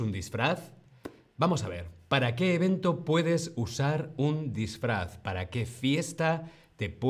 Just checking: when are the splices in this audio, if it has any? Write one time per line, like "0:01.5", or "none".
none